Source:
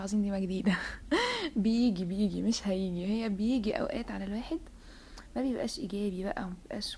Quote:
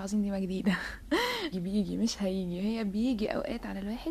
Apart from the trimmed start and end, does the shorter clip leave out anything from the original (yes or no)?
yes